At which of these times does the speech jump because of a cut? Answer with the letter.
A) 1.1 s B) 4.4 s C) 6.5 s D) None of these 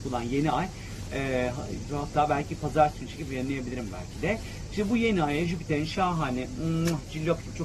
A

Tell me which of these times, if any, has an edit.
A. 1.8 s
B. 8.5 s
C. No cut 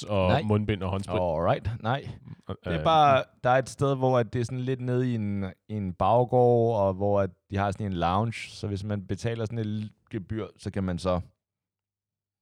C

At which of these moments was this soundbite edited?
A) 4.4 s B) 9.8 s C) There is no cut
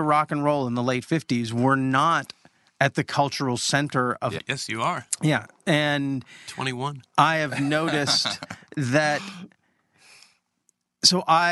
A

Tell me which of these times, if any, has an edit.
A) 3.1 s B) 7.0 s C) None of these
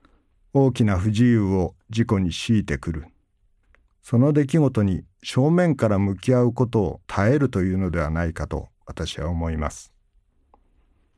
B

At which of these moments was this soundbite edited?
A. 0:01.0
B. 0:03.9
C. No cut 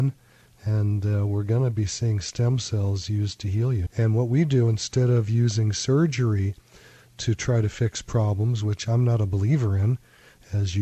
B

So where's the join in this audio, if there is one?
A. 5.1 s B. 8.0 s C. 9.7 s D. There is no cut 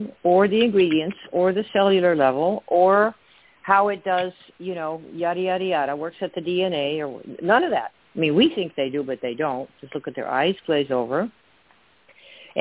B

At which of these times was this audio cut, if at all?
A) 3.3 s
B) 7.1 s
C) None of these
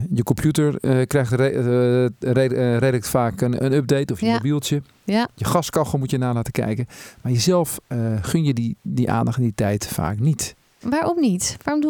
C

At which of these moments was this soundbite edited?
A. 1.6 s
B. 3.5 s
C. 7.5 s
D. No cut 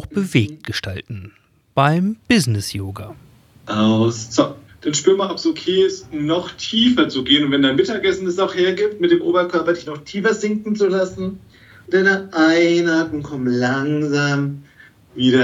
D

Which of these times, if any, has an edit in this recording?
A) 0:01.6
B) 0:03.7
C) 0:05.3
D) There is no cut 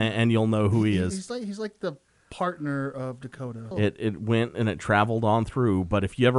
B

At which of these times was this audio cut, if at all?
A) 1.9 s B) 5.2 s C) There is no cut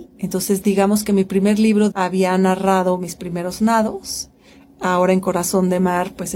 A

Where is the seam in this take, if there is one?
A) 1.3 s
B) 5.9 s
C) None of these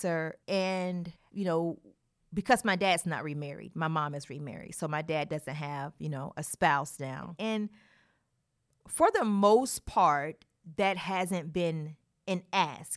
A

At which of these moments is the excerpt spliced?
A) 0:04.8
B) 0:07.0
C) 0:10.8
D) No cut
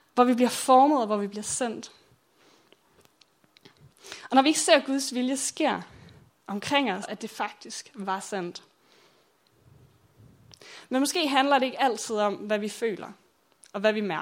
B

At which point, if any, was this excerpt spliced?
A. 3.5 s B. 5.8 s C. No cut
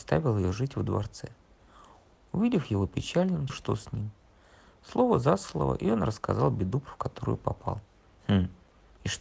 A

